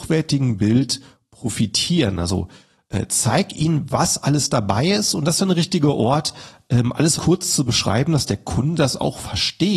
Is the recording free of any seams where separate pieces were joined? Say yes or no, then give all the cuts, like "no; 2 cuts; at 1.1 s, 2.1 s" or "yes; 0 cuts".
no; 1 cut; at 7.2 s